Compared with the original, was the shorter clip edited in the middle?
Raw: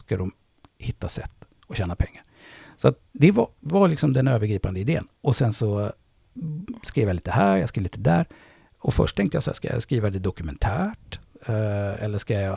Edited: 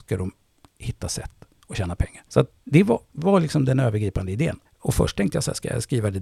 yes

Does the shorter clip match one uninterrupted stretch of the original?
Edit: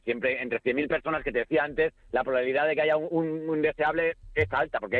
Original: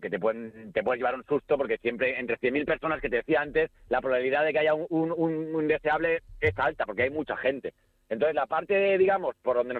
no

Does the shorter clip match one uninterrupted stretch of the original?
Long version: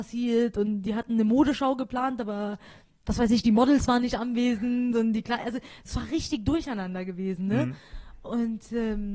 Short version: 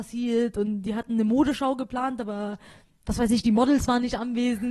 yes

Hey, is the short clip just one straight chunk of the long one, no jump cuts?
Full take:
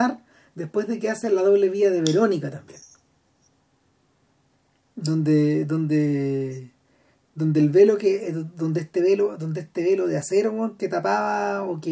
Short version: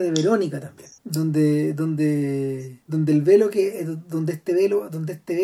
no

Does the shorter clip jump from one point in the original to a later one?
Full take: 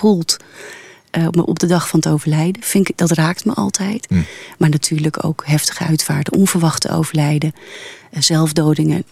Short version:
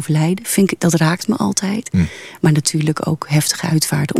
no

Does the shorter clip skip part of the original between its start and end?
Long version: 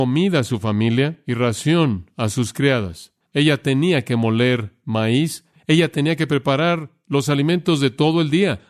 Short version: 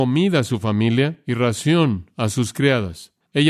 no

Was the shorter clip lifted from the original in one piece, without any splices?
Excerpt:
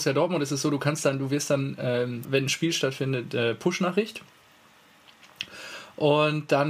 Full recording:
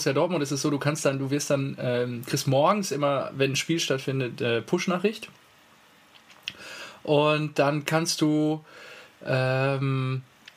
no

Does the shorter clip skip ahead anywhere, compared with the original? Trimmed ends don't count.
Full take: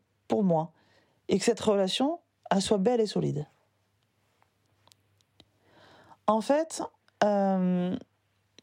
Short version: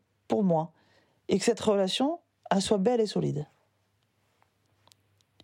no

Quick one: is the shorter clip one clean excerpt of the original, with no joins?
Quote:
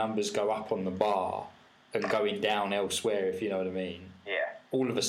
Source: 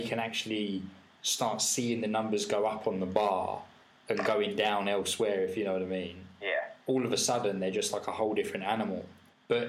yes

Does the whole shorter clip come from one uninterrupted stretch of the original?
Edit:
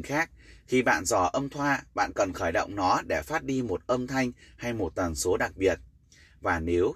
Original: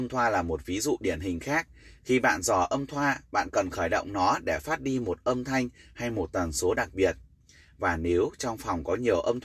yes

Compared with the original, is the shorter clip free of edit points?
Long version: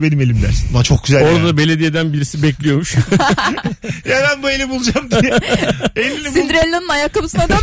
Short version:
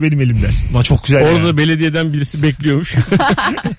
yes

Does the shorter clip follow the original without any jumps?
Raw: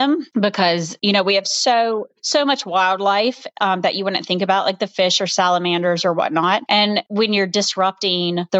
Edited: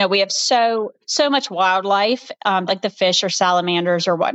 no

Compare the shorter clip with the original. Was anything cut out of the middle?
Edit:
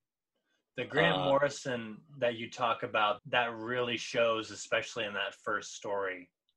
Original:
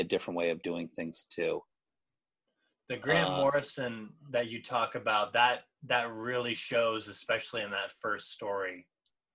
yes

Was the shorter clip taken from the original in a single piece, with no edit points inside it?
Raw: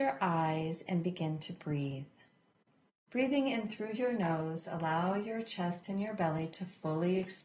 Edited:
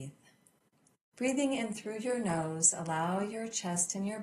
yes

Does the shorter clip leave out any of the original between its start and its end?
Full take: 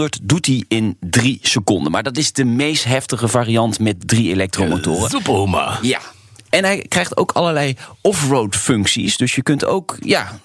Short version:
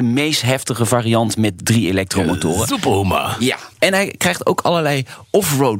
yes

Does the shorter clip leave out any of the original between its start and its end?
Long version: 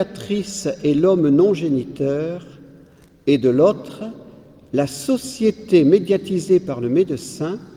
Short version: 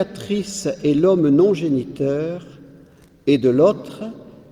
no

